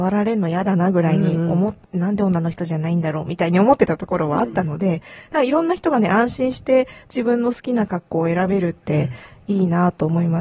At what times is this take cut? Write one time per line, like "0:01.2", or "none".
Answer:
none

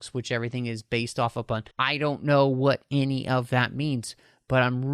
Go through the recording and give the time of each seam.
0:01.7

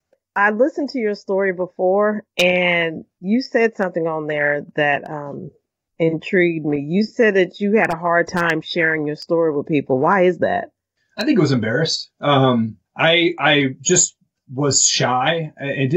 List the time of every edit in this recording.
0:12.9

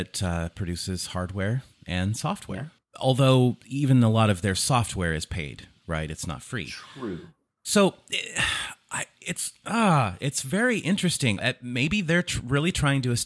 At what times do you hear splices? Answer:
0:11.4

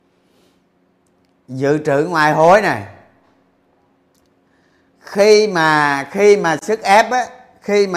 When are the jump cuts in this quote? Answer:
none

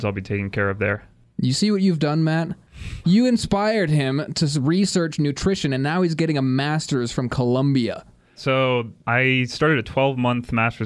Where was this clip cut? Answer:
0:03.0
0:08.4

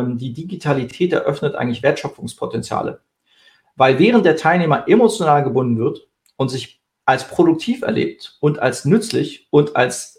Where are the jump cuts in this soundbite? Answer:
none

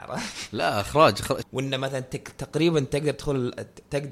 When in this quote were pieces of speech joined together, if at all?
0:01.4

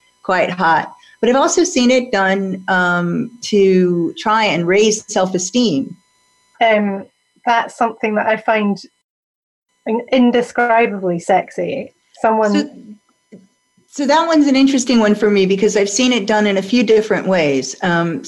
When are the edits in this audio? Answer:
0:06.5

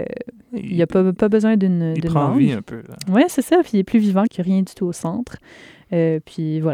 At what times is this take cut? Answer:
0:04.3

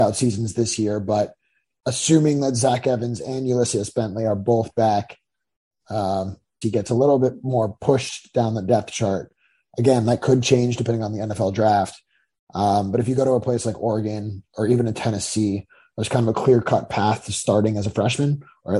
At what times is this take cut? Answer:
0:06.6

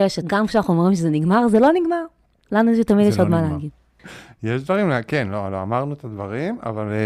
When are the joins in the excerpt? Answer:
0:04.0

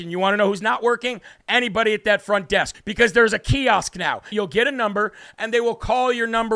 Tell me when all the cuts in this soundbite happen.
0:02.7
0:04.3

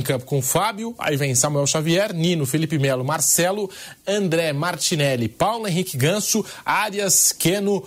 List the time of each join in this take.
none

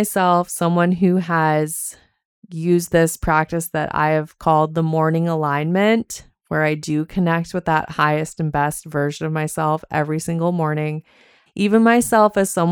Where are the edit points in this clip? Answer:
0:11.5

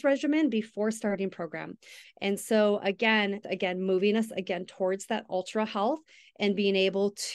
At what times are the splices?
0:02.0
0:03.4

